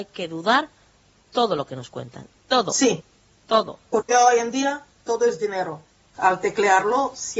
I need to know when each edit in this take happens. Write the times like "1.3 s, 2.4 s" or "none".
6.1 s